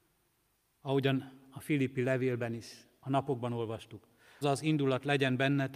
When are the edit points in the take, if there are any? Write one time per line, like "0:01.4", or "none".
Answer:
0:04.4